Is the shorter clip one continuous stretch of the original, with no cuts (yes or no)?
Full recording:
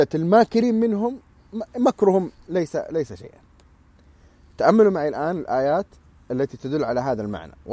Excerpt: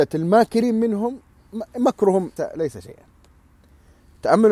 no